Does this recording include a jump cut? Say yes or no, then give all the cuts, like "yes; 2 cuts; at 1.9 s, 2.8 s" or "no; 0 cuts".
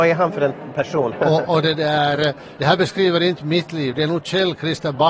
yes; 1 cut; at 1.1 s